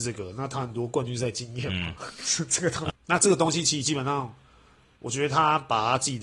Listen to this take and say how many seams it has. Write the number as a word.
one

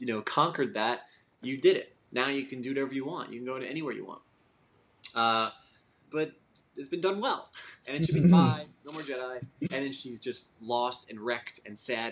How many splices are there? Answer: two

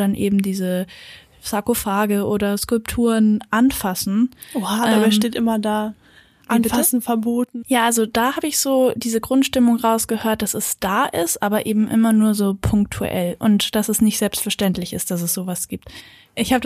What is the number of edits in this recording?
one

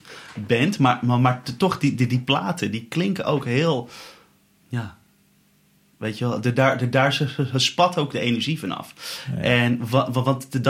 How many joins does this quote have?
zero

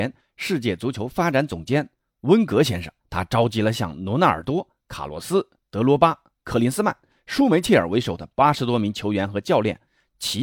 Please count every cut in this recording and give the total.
one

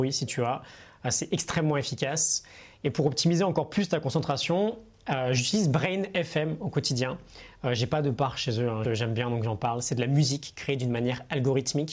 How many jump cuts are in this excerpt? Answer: one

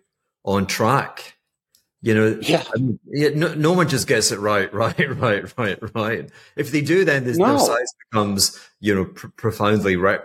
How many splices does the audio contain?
zero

